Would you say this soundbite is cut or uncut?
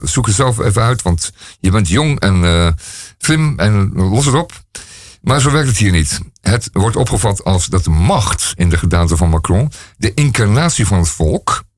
uncut